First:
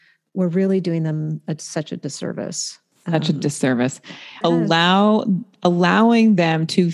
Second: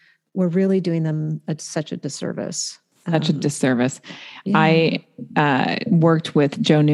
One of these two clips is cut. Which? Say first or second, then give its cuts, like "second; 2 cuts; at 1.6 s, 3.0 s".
first; 1 cut; at 4.4 s